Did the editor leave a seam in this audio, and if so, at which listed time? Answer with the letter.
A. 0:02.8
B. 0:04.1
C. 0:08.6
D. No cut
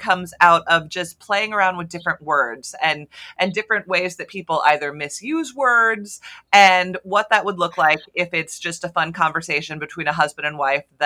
D